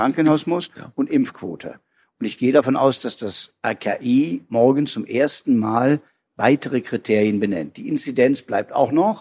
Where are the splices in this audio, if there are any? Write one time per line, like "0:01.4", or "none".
none